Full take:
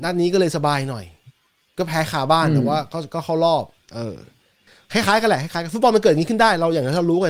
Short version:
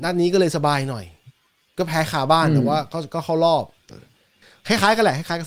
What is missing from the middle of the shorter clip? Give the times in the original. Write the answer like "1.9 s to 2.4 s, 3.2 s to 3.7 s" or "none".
3.9 s to 4.1 s